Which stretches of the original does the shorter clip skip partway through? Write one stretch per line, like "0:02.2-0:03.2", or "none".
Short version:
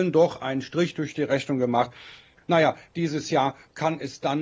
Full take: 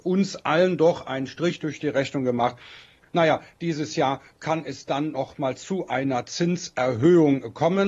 none

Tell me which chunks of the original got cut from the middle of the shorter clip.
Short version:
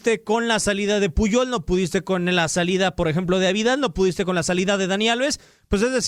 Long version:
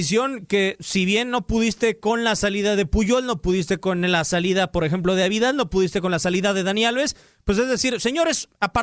none

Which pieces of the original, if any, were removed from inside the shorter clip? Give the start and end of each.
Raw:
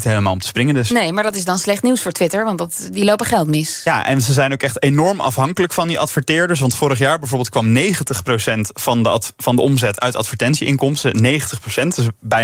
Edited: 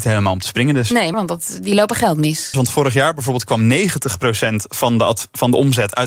0:01.1-0:02.4
0:03.8-0:06.6

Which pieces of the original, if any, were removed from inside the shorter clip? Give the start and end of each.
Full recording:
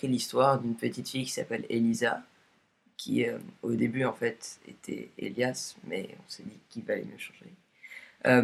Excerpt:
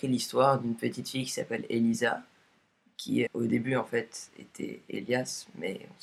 0:03.3-0:03.6

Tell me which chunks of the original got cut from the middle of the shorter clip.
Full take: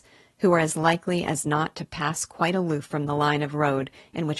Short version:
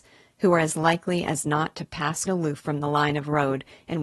0:02.3-0:02.5

